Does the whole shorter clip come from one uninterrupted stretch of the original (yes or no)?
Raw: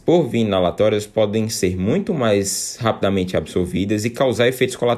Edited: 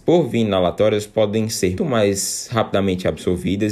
no